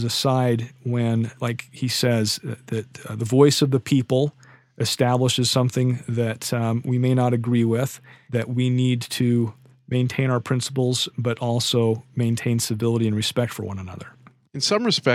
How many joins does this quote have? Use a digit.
0